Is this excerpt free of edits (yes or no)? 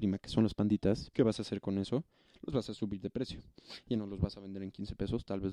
no